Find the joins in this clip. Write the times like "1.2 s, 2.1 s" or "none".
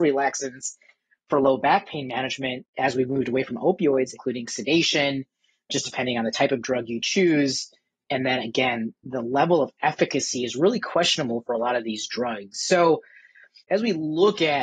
4.1 s

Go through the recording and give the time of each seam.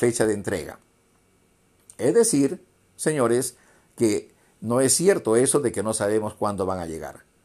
none

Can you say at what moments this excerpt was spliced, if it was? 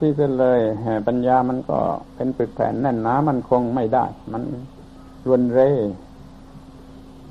2.1 s

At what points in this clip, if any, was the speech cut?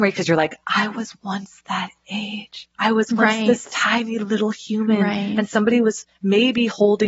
2.7 s

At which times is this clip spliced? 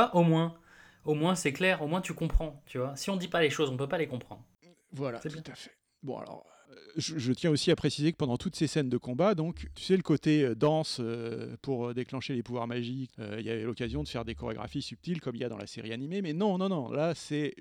9.7 s, 13.1 s

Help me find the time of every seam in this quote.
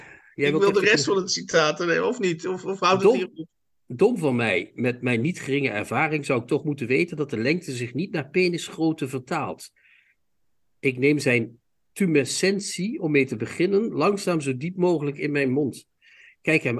none

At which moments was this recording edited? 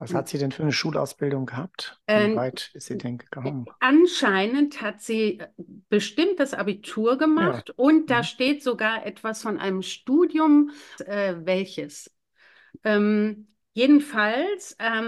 11.0 s

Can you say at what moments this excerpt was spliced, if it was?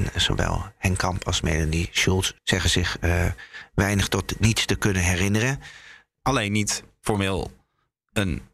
2.4 s, 6.2 s

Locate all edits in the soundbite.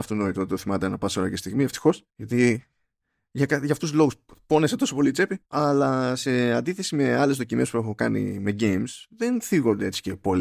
2.1 s, 5.4 s

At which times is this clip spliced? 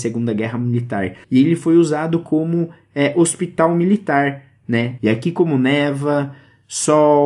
1.2 s, 5.0 s

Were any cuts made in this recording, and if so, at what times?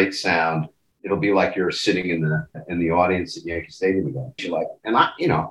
4.4 s

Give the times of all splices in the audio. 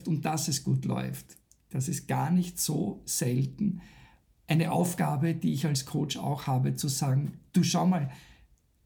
none

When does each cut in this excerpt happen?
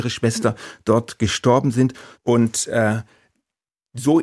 2.1 s

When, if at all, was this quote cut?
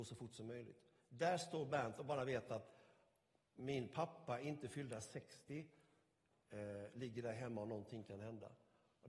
none

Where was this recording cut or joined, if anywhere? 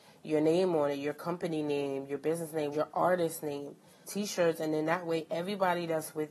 2.7 s, 4.0 s

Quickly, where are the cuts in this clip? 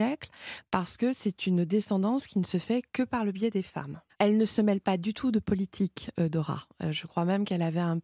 4.1 s

